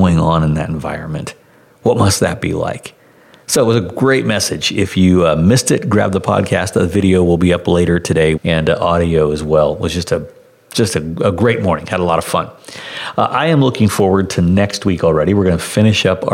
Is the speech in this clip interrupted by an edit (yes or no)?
yes